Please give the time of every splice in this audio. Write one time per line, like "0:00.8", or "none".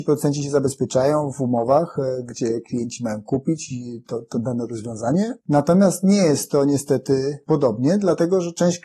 0:05.4